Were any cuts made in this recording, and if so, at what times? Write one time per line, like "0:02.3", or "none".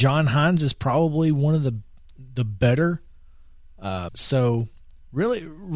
0:04.1